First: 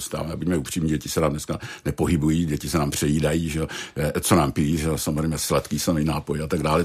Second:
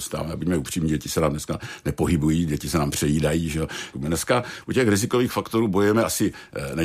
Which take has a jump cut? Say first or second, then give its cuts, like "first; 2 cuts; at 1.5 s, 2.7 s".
second; 1 cut; at 3.9 s